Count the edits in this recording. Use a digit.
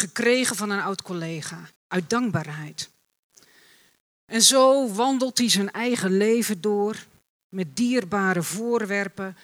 1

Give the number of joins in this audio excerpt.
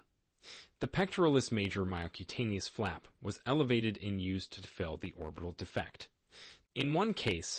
1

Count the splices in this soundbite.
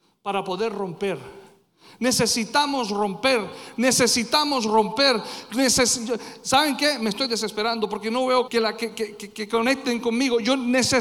1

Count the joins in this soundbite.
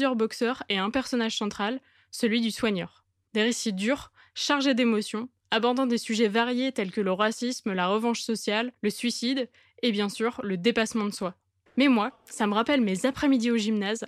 1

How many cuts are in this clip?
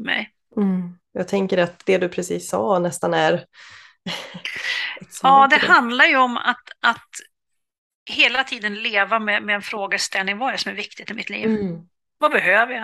1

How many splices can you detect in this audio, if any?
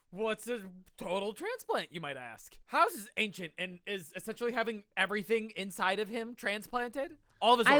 1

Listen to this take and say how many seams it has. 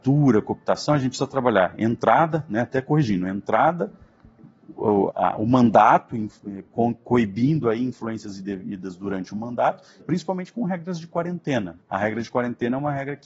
3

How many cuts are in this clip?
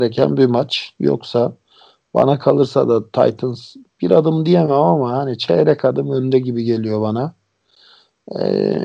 0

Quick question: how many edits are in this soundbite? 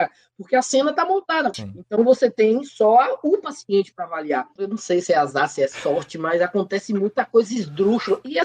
2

